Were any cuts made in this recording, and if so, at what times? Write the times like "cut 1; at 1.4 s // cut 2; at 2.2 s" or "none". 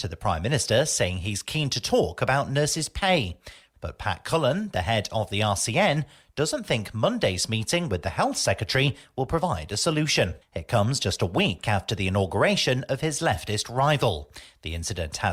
cut 1; at 3.7 s // cut 2; at 10.4 s